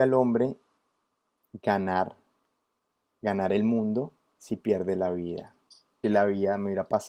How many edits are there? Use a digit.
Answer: 1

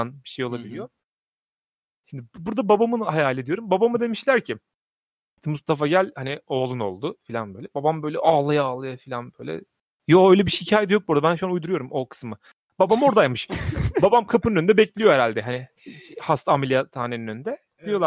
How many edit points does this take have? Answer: 0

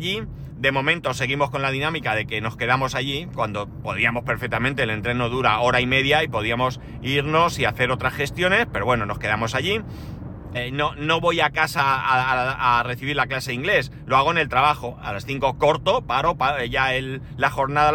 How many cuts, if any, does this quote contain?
1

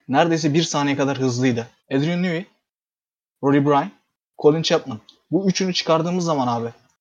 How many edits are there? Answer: 1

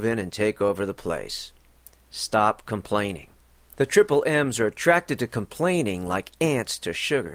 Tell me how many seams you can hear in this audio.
1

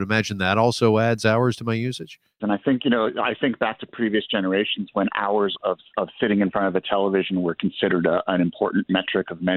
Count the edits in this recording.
2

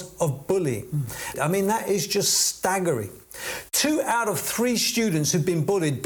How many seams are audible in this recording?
1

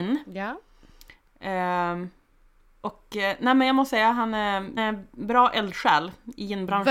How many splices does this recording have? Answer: 1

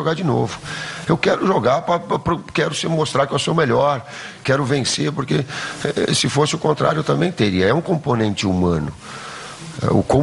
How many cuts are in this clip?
1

